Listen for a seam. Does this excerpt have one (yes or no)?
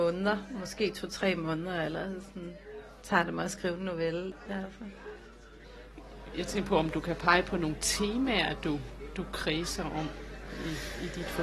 yes